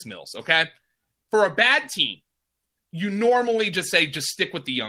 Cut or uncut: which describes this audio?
uncut